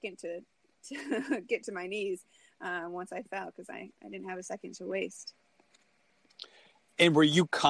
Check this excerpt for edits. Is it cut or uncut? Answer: uncut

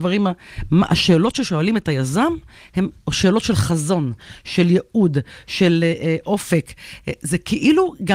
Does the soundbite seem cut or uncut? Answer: uncut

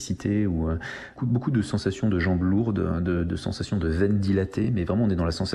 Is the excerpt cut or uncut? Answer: uncut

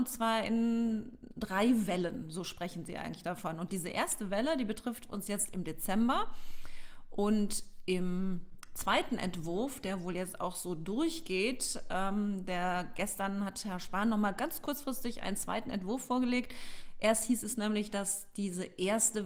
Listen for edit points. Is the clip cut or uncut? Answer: uncut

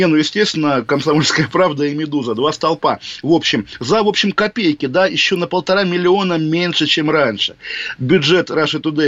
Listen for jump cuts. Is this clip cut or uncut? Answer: uncut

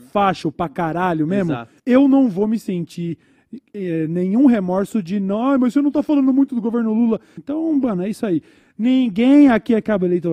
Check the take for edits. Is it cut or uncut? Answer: cut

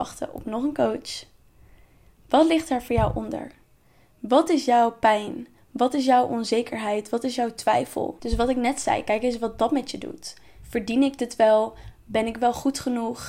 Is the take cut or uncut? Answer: cut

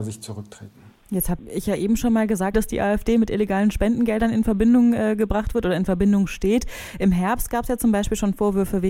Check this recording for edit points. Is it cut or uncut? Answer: cut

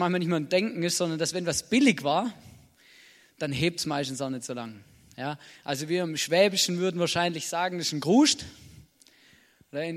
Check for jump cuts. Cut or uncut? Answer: uncut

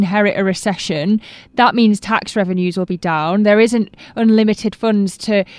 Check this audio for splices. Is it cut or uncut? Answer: uncut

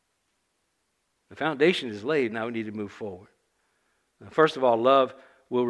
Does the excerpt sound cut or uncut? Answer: uncut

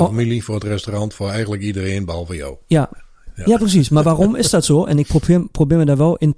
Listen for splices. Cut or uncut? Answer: uncut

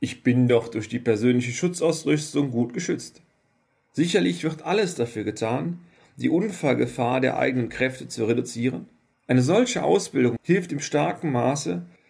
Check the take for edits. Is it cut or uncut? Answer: cut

